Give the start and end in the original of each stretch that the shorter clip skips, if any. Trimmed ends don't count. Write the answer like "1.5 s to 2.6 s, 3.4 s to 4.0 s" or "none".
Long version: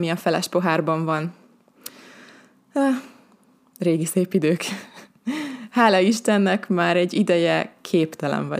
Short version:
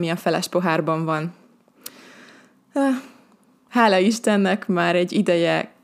3.7 s to 5.7 s